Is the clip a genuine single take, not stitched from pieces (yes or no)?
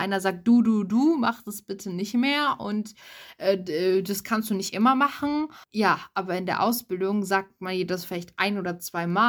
no